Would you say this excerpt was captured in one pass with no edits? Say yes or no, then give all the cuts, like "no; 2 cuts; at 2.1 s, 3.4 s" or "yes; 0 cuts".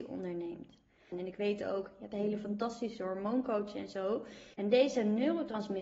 no; 2 cuts; at 1.1 s, 4.5 s